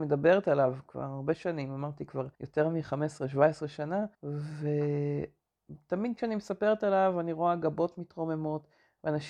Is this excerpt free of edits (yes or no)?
no